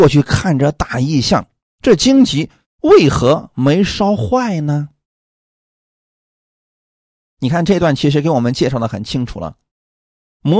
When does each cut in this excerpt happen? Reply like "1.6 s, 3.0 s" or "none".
none